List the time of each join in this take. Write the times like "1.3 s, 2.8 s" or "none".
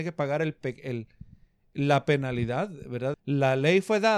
3.1 s